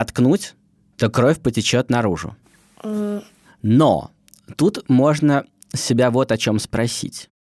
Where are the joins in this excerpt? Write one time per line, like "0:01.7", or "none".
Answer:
none